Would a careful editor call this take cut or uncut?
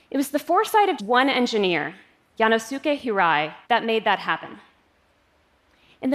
cut